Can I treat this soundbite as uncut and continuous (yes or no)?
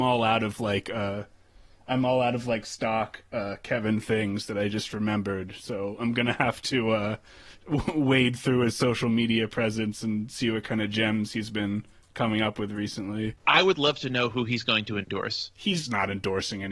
yes